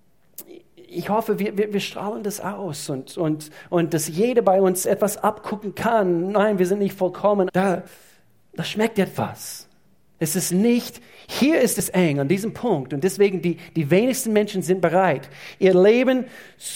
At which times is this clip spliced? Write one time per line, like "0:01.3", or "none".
0:07.5